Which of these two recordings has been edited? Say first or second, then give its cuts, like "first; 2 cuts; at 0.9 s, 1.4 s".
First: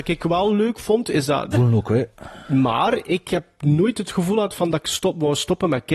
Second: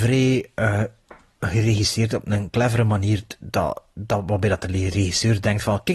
first; 1 cut; at 1.5 s